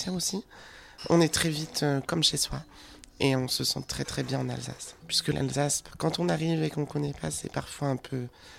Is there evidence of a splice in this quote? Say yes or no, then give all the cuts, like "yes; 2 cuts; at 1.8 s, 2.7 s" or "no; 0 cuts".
yes; 1 cut; at 5.0 s